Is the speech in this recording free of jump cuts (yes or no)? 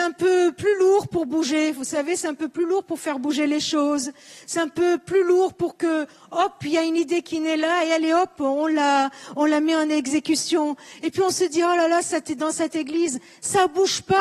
yes